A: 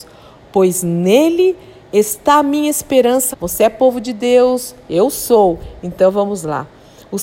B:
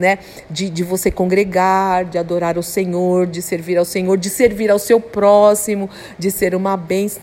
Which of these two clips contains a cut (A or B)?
A